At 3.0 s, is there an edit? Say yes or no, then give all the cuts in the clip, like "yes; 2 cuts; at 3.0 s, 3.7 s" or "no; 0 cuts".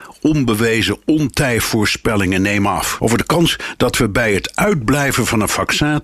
yes; 1 cut; at 3.0 s